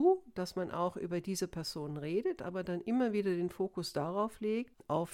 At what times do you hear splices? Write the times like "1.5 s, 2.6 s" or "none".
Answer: none